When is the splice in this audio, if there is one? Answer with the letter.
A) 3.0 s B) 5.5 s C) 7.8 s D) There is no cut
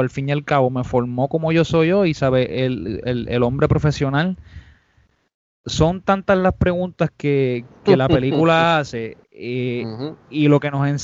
A